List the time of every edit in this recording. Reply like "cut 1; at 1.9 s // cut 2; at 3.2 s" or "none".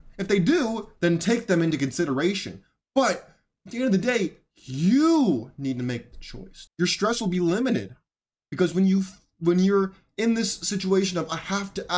cut 1; at 1.0 s // cut 2; at 6.7 s // cut 3; at 8.4 s